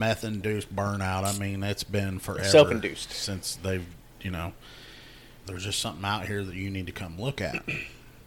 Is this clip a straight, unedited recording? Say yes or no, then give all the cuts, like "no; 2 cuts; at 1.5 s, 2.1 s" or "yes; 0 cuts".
no; 1 cut; at 5.4 s